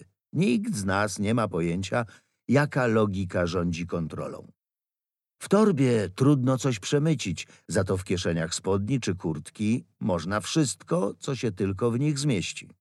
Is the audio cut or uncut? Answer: uncut